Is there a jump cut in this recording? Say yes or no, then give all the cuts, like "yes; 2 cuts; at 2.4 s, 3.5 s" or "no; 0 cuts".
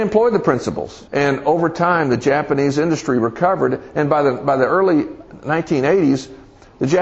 yes; 1 cut; at 1.1 s